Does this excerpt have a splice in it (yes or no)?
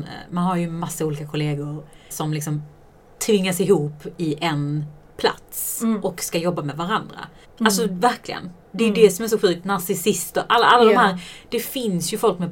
yes